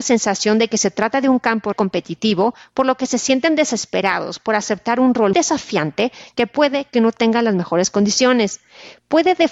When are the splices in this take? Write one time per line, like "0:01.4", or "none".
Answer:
0:01.7
0:05.3